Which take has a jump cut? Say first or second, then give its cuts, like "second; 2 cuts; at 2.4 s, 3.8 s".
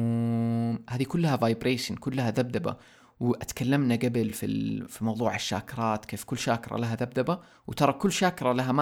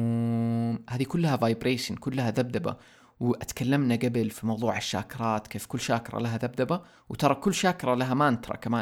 second; 1 cut; at 4.3 s